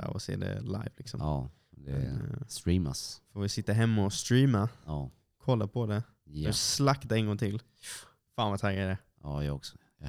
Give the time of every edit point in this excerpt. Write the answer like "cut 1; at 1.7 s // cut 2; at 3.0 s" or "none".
none